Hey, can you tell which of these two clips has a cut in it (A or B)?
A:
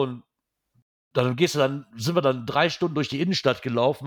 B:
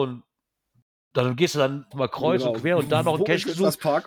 B